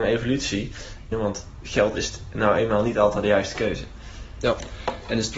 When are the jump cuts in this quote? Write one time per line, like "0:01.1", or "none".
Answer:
0:01.1